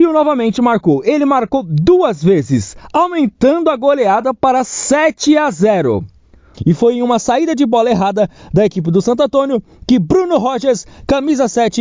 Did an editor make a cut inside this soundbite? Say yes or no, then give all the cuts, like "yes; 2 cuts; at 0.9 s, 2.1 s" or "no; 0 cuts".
yes; 1 cut; at 6.5 s